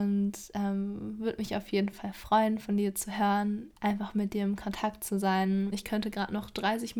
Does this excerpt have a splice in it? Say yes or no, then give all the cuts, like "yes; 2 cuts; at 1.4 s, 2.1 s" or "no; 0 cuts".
yes; 2 cuts; at 3.8 s, 5.7 s